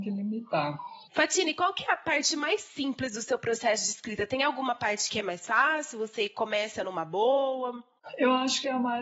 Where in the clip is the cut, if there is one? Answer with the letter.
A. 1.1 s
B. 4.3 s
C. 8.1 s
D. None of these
A